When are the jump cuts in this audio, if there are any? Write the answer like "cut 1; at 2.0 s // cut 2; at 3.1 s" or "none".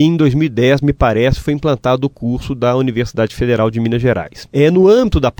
none